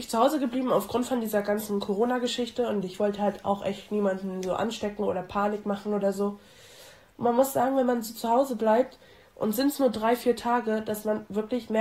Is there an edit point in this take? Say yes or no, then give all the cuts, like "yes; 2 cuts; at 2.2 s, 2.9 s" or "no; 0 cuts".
no; 0 cuts